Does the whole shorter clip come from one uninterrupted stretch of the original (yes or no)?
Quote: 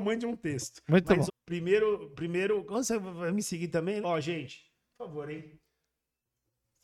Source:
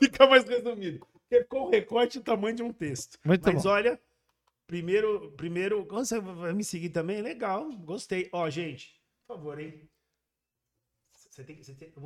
no